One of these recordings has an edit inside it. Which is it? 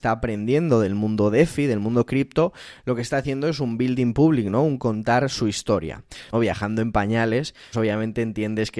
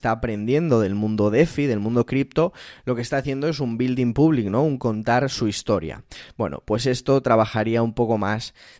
first; 2 cuts; at 6.3 s, 7.7 s

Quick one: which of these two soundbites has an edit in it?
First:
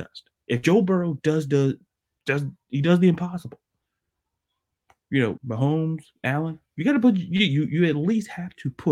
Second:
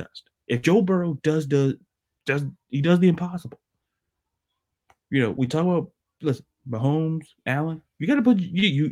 first; 1 cut; at 5.4 s

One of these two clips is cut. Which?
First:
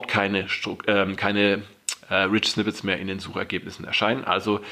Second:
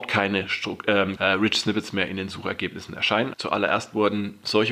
second; 2 cuts; at 1.2 s, 3.3 s

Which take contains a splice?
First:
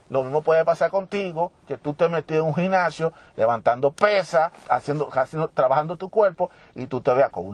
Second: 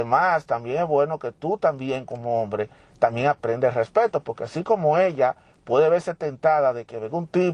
first; 1 cut; at 4.6 s

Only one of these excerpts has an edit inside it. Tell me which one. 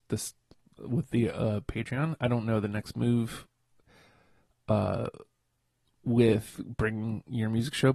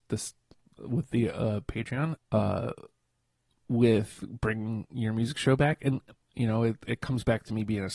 second; 1 cut; at 2.2 s

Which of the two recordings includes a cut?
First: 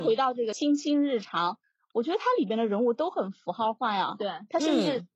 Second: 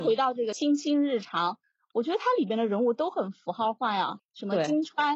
second; 1 cut; at 4.2 s

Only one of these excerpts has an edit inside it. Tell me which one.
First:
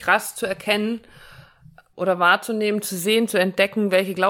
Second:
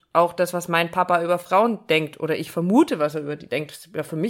first; 1 cut; at 1.9 s

